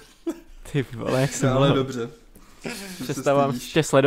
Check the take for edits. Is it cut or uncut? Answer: uncut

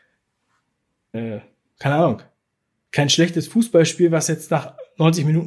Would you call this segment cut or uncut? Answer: cut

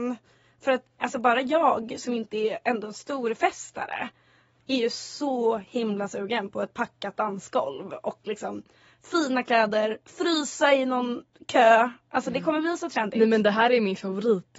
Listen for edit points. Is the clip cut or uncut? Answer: cut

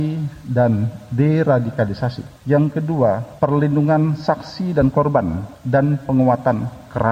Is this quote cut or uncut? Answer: cut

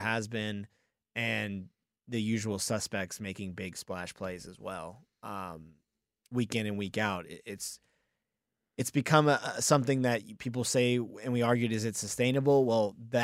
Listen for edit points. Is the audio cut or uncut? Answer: uncut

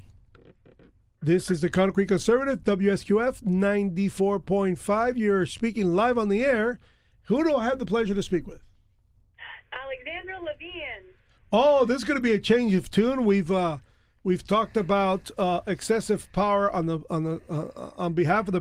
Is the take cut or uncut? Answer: uncut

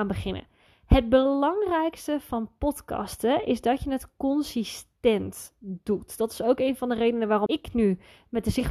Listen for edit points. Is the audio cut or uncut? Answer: cut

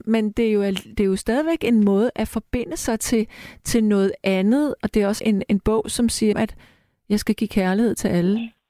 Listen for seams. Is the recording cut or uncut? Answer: cut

